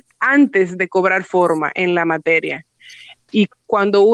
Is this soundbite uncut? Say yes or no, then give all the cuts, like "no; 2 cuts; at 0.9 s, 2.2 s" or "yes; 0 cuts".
yes; 0 cuts